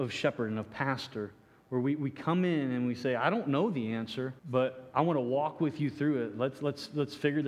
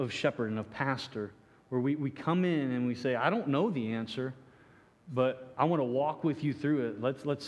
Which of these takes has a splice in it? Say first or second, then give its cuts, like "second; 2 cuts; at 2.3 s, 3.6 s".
first; 1 cut; at 4.4 s